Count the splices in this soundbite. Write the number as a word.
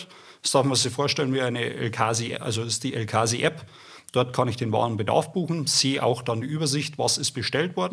zero